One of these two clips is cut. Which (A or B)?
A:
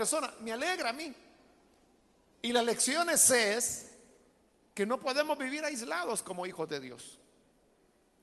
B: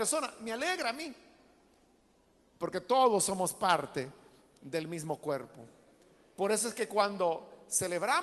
A